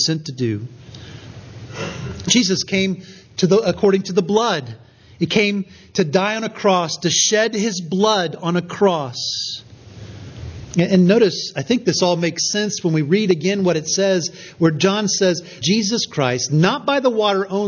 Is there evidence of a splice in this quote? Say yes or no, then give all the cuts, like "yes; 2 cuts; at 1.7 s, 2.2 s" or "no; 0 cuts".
yes; 1 cut; at 15.6 s